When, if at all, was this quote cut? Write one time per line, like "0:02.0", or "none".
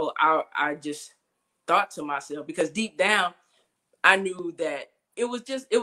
none